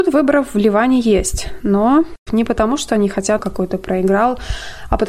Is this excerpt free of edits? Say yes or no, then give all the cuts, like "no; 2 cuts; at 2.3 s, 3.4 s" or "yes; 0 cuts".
no; 2 cuts; at 2.3 s, 3.4 s